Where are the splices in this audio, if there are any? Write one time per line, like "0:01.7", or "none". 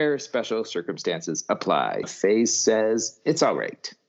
0:02.0

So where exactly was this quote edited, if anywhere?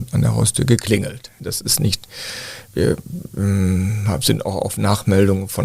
0:01.4

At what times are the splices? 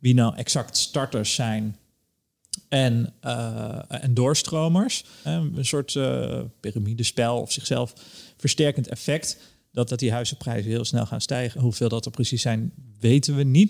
0:05.2
0:09.9
0:11.5

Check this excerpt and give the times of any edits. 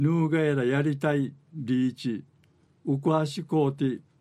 0:02.7

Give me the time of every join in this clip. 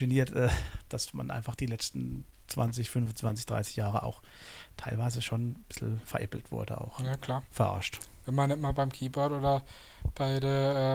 0:07.5

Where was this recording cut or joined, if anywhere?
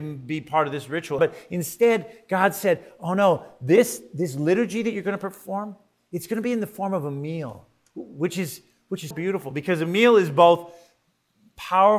0:01.2
0:09.1

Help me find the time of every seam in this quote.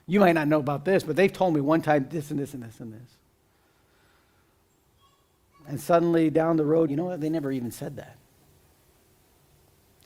0:06.9

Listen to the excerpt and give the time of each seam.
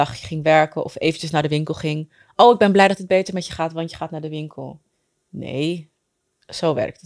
none

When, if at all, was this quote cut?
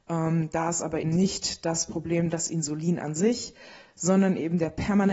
0:01.0

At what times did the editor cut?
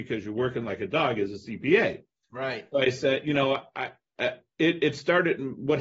none

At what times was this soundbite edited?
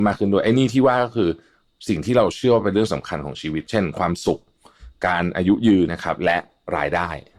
0:05.9

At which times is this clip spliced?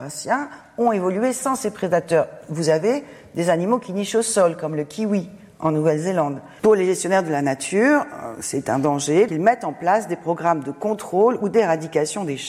0:06.6
0:09.3

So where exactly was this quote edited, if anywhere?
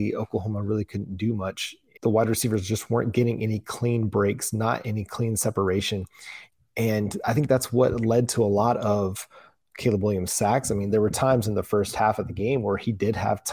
0:02.0

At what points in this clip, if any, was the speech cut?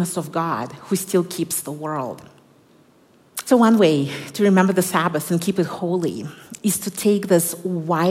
0:03.5

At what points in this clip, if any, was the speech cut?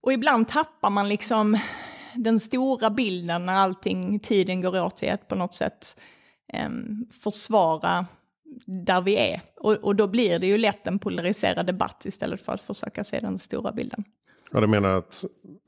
none

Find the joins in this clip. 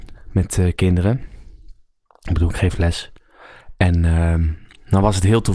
none

